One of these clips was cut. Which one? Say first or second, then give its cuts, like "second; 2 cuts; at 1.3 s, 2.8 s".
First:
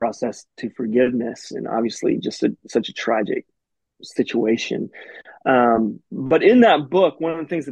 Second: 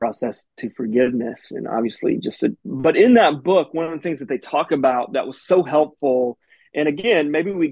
second; 1 cut; at 2.6 s